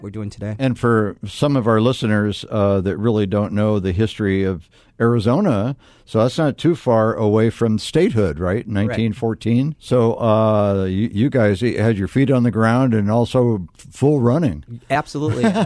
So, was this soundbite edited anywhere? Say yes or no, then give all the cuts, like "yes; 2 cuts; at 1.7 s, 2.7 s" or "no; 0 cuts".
yes; 1 cut; at 9.7 s